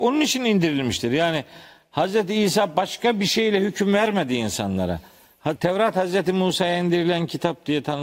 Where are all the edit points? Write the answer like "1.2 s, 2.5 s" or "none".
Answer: 5.6 s